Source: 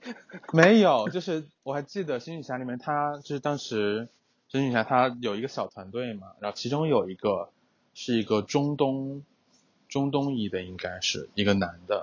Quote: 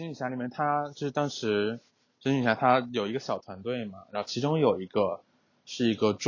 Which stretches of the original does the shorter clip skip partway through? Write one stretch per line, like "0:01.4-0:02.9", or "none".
none